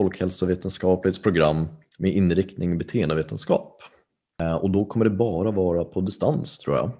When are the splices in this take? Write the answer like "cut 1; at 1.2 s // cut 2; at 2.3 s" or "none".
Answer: none